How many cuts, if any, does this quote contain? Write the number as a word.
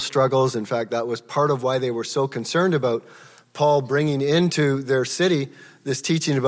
zero